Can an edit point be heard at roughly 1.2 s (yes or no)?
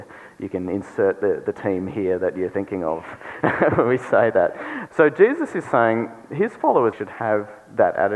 no